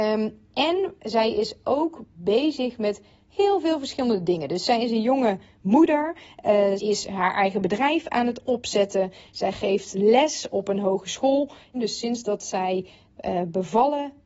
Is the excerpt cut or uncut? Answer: cut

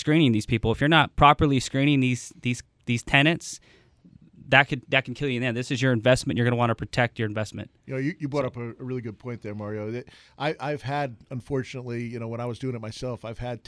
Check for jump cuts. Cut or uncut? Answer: uncut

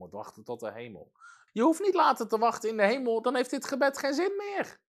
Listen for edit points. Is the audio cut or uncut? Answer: cut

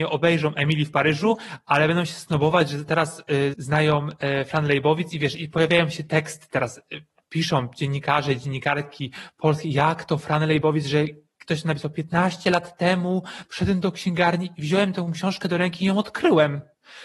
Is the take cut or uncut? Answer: cut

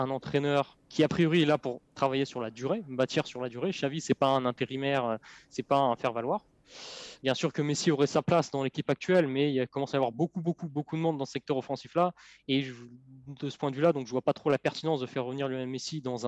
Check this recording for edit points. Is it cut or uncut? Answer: cut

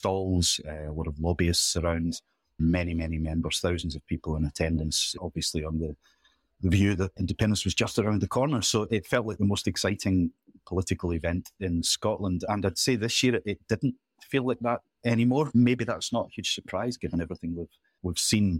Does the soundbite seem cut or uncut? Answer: uncut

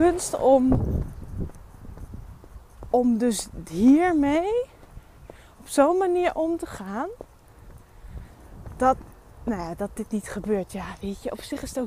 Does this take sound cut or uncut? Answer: cut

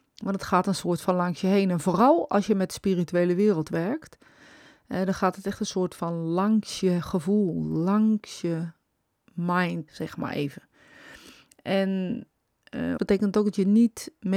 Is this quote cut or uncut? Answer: cut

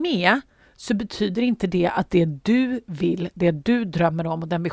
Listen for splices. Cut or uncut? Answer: uncut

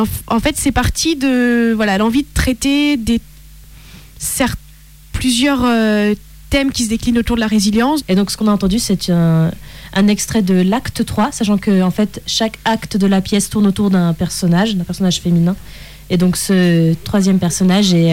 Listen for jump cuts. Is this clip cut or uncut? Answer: cut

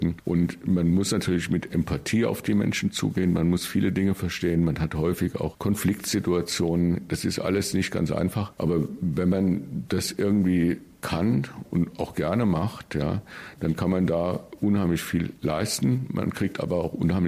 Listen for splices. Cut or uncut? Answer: uncut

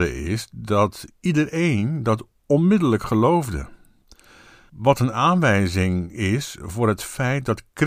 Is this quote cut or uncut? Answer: uncut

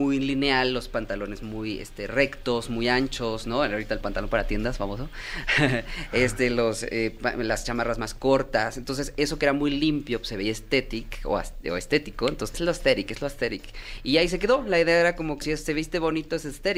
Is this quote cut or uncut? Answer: cut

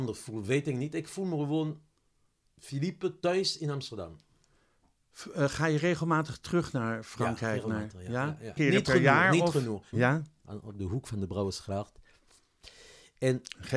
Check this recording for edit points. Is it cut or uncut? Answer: cut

